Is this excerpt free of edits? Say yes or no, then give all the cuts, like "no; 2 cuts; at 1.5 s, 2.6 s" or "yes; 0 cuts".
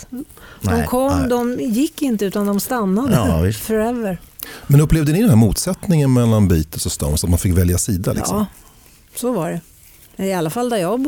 yes; 0 cuts